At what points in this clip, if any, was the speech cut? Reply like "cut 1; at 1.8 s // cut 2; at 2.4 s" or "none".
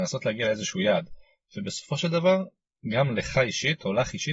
none